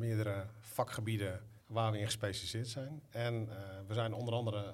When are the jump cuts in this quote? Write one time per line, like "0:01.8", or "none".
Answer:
0:01.6